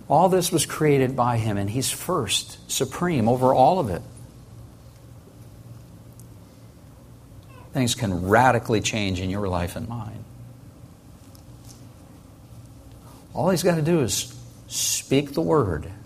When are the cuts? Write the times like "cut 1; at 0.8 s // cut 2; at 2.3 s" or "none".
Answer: cut 1; at 7.7 s // cut 2; at 13.2 s